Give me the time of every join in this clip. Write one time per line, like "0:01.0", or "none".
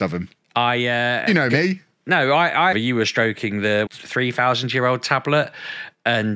0:02.7
0:03.9

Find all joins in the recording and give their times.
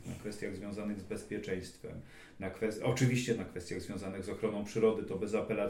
none

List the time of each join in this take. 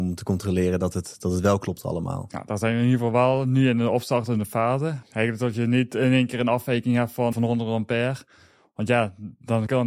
0:05.0
0:07.3

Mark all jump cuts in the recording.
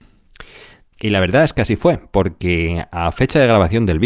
0:00.9

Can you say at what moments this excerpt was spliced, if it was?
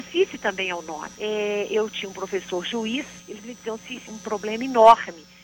0:01.1
0:04.0

